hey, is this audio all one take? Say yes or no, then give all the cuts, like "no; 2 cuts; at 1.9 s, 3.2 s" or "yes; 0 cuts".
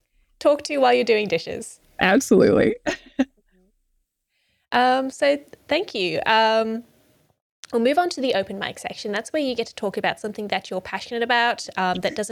yes; 0 cuts